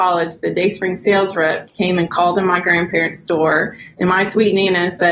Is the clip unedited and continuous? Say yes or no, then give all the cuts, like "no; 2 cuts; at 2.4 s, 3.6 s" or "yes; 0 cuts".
yes; 0 cuts